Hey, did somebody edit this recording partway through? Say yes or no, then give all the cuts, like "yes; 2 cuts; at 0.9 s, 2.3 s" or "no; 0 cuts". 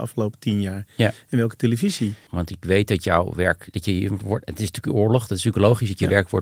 yes; 1 cut; at 2.3 s